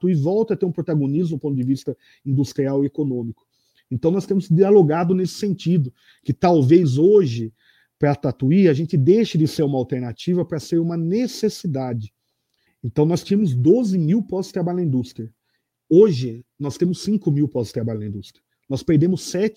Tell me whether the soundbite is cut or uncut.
cut